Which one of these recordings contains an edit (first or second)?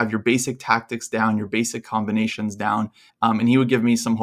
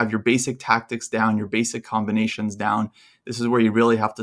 first